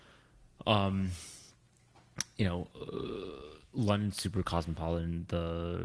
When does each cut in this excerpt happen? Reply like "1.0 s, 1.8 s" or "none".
none